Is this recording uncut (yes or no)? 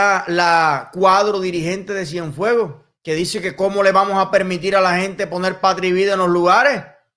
yes